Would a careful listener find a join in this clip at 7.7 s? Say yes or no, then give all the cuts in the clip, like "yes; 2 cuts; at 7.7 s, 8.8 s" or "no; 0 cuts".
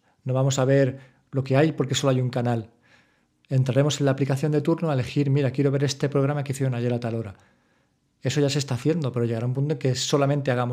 no; 0 cuts